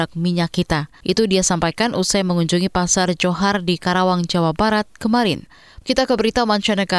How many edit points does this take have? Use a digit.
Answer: 2